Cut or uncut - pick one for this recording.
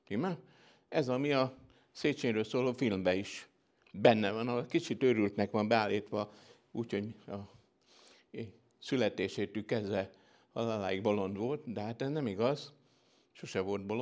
uncut